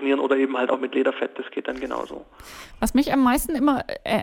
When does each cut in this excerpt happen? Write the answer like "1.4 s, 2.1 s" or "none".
none